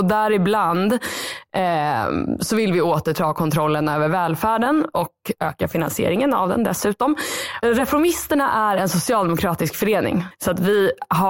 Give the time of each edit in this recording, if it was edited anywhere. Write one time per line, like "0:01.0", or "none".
0:07.6
0:10.3